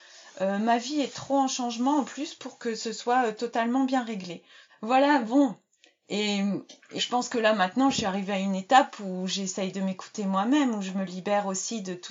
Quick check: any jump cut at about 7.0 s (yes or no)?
yes